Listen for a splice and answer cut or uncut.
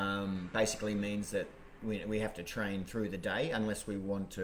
uncut